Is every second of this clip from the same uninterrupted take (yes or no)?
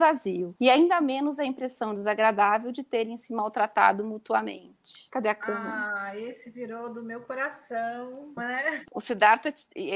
no